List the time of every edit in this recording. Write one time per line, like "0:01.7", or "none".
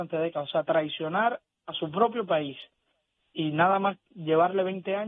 none